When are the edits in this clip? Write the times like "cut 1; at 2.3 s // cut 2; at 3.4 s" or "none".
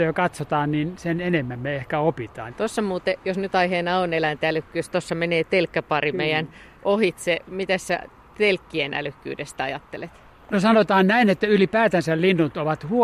cut 1; at 2.5 s